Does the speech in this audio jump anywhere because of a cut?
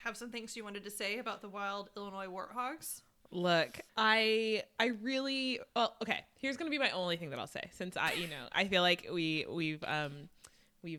yes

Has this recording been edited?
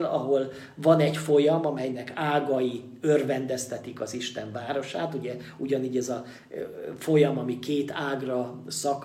no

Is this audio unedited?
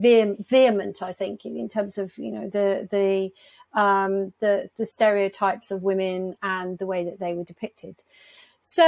yes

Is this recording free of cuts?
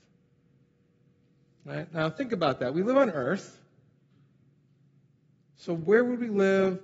yes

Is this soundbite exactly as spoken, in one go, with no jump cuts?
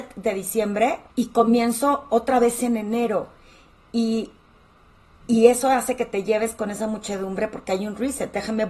no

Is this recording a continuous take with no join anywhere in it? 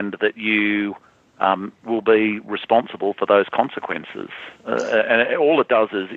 yes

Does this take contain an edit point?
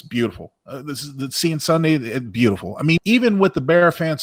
yes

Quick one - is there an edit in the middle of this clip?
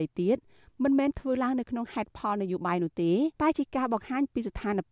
yes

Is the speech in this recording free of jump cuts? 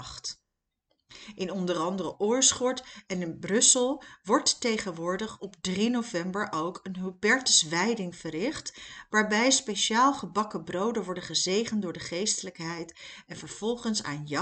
yes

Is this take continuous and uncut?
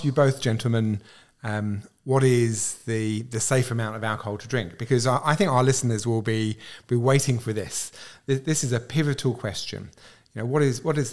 yes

